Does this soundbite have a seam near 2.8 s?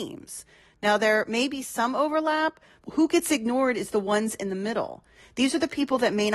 yes; 1 cut; at 2.8 s

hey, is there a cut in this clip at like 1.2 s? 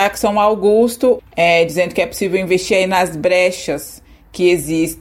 yes; 1 cut; at 1.2 s

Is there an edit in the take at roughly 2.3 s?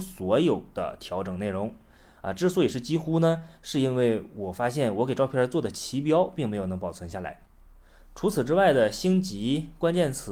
no; 0 cuts

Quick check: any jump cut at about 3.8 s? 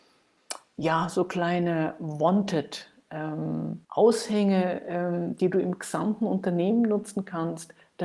yes; 1 cut; at 3.8 s

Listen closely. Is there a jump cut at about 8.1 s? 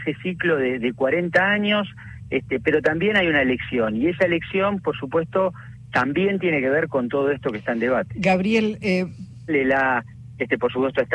no; 1 cut; at 9.5 s

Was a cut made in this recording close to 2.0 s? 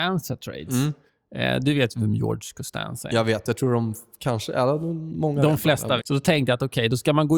no; 1 cut; at 6.0 s

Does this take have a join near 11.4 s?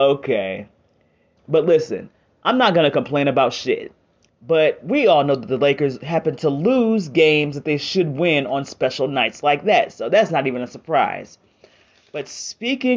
no; 2 cuts; at 1.4 s, 4.3 s

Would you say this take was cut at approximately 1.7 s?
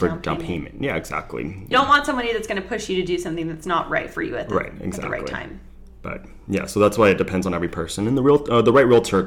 yes; 1 cut; at 1.7 s

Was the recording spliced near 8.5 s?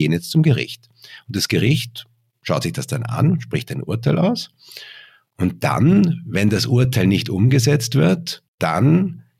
yes; 1 cut; at 8.5 s

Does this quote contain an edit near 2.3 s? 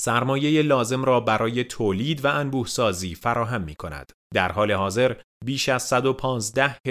no; 1 cut; at 4.2 s

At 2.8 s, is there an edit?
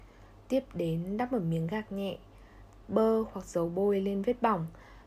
yes; 1 cut; at 2.8 s

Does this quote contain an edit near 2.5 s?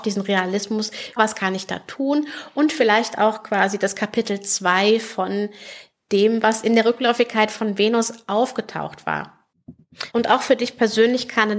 no; 2 cuts; at 1.2 s, 10.1 s

